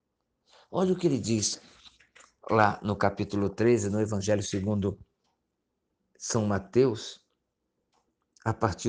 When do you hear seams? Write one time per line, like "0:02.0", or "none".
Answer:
none